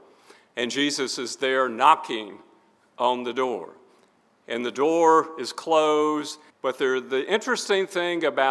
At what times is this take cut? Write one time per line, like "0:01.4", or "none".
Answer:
0:06.5